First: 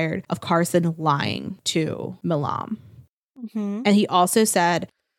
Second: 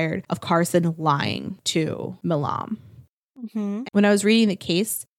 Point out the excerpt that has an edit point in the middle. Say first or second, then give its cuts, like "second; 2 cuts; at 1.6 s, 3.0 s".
second; 1 cut; at 3.8 s